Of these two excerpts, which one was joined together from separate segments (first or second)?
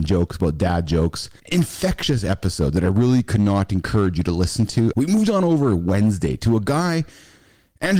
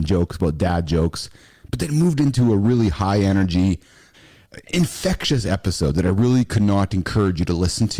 first